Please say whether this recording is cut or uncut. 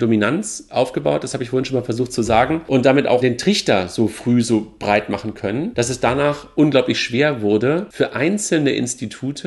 uncut